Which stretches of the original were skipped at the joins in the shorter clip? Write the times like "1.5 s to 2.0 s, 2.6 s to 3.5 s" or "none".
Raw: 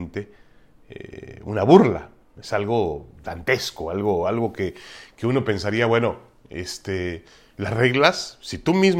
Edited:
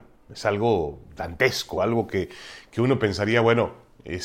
3.8 s to 4.2 s